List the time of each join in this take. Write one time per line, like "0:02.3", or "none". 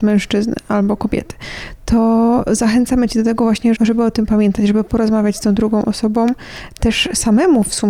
0:03.8

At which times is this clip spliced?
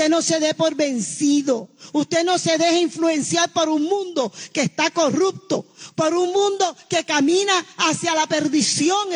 0:01.9

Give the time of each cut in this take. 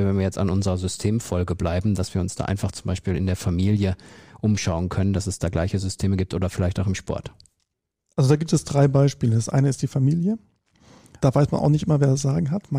none

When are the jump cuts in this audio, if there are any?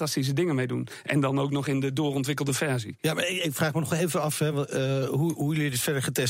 none

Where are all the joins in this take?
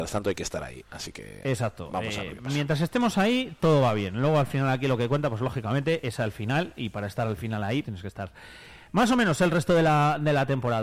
0:07.8

